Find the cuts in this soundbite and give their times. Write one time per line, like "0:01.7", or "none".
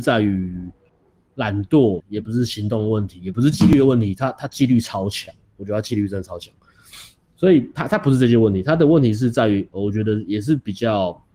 0:02.0